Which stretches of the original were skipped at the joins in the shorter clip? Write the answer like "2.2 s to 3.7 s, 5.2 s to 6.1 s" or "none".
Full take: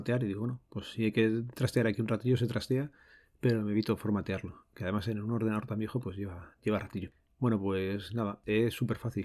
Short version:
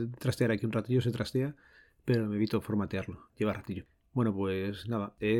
4.7 s to 6.6 s